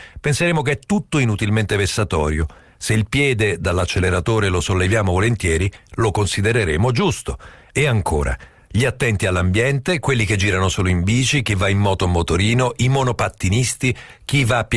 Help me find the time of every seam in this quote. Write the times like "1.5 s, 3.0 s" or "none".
none